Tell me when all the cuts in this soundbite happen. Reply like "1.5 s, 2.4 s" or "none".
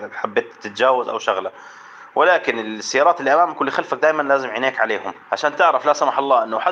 5.2 s